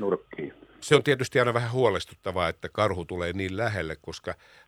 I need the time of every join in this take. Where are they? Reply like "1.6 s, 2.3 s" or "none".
none